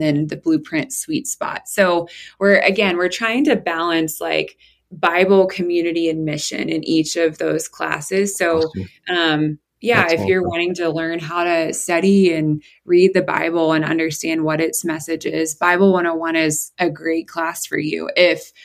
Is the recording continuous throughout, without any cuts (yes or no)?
yes